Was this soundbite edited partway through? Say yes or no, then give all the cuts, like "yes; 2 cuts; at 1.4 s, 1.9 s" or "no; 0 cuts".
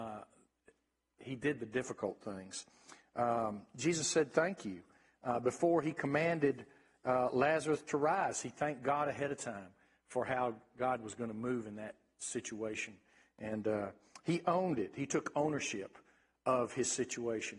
no; 0 cuts